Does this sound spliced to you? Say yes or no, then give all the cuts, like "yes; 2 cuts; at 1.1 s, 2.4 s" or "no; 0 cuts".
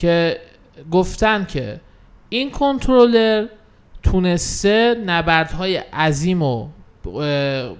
no; 0 cuts